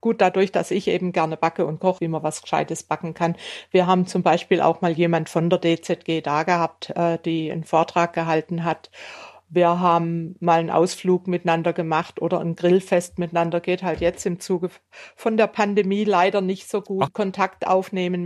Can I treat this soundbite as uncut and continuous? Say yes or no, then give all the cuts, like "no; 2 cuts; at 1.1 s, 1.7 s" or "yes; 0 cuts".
no; 2 cuts; at 2.0 s, 17.1 s